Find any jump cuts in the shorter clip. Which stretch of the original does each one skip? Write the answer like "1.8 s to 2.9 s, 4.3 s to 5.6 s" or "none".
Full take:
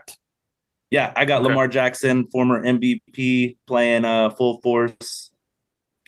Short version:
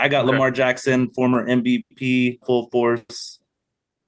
3.6 s to 4.3 s